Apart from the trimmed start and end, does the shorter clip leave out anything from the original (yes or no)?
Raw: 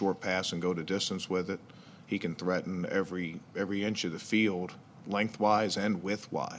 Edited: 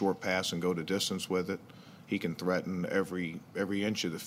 no